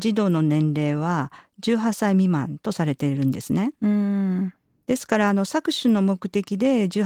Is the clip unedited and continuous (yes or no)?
yes